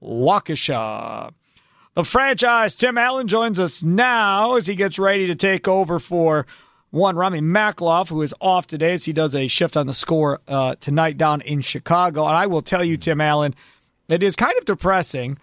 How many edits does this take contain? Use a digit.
0